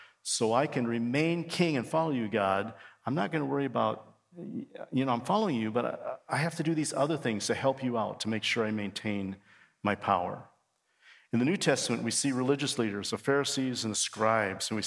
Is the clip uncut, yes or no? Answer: yes